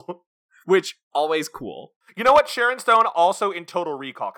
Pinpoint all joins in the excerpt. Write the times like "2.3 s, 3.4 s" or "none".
none

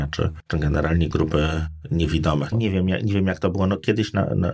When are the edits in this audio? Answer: 1.1 s, 2.5 s

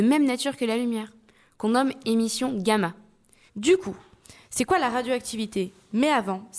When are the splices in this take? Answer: 3.5 s

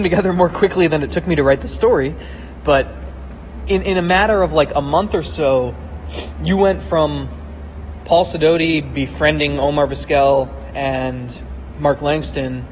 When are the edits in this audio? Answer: none

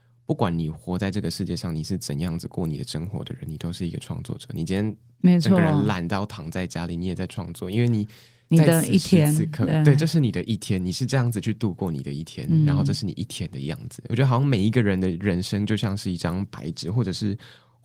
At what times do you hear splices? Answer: none

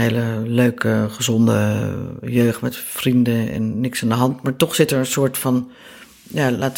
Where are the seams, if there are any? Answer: none

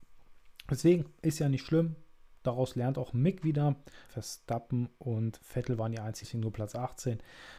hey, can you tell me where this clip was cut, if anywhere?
4.1 s, 6.2 s

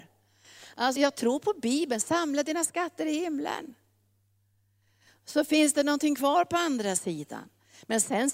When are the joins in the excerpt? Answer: 1.0 s

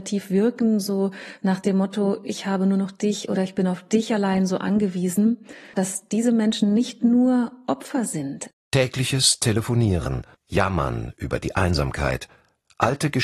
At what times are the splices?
5.7 s, 8.5 s, 10.3 s

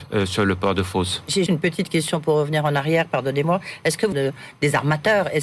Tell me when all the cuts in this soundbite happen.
1.5 s, 4.1 s

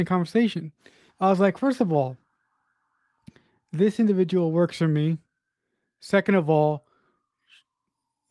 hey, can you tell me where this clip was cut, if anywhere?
1.1 s

